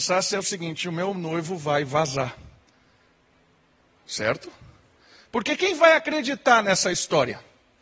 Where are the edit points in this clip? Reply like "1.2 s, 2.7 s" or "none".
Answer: none